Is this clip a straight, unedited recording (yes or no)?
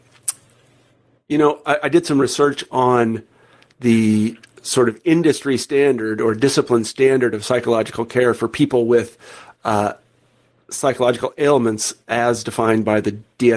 no